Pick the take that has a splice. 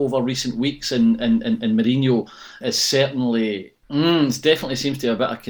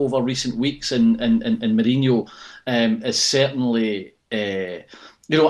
first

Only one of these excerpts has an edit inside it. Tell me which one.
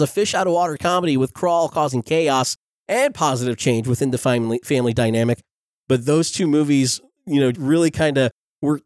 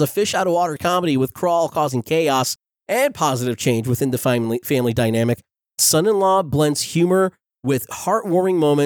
first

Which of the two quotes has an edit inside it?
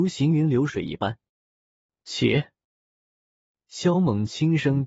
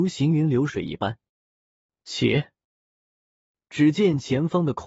second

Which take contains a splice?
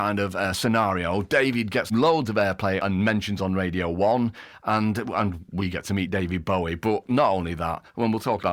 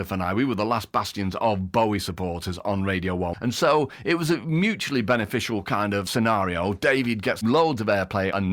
second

